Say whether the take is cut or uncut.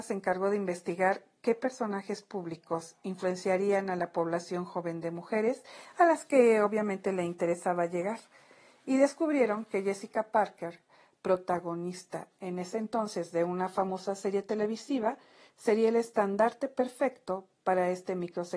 uncut